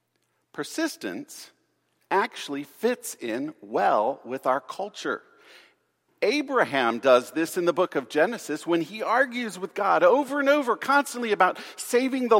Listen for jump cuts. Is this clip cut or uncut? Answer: cut